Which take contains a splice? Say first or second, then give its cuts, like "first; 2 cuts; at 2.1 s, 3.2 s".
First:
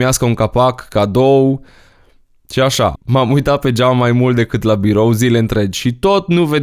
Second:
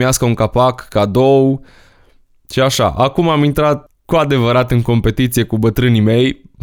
first; 1 cut; at 2.9 s